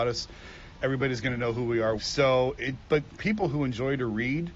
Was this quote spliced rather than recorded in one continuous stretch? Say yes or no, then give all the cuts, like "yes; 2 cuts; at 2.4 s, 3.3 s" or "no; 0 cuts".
yes; 1 cut; at 2.0 s